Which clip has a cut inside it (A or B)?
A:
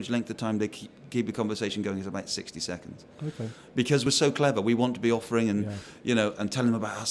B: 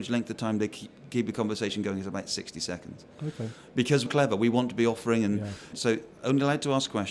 B